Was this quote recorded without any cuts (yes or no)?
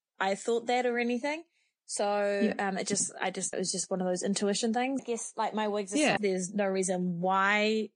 no